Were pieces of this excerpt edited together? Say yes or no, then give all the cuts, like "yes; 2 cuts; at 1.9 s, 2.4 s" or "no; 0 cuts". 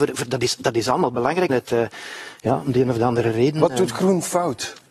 yes; 1 cut; at 1.5 s